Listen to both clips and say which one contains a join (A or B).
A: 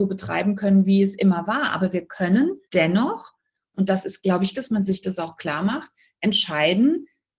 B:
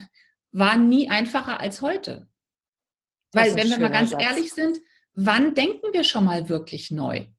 A